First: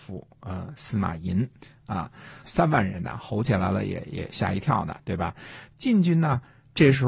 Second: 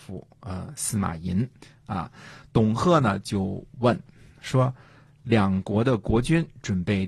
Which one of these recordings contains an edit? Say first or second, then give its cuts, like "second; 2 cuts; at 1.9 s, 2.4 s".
first; 2 cuts; at 2.4 s, 5.7 s